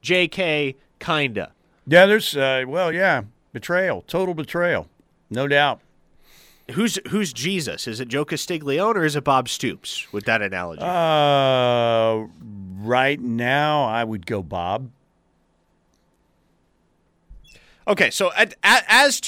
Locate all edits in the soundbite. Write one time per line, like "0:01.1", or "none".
none

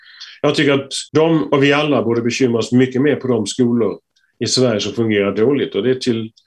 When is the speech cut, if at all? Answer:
0:01.1

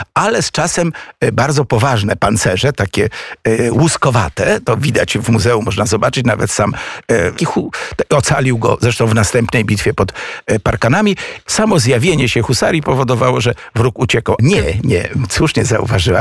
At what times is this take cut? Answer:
0:07.4
0:11.5
0:14.4

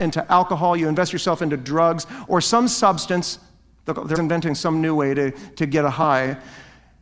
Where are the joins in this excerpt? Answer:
0:04.1

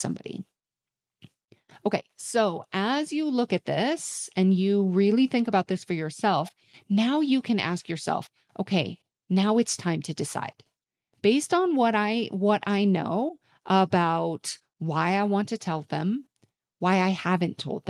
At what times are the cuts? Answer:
none

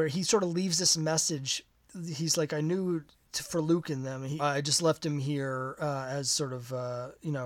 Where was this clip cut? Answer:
0:04.4

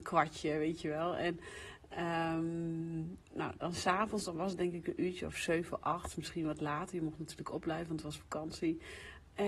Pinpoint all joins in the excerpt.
none

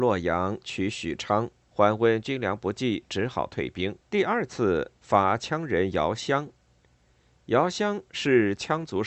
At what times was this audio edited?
0:01.7
0:04.0

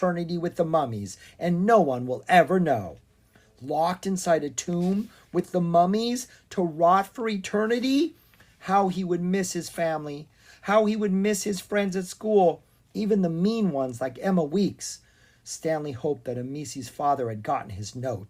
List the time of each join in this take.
none

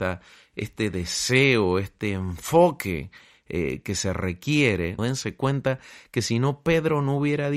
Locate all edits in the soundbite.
0:05.0

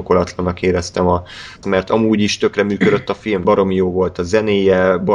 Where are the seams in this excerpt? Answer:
0:01.6
0:03.4

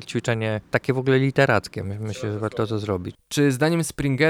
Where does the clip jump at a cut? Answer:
0:03.1

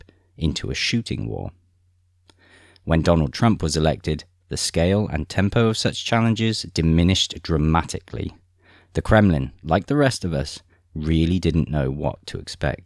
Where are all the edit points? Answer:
none

